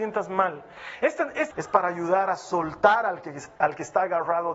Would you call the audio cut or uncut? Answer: cut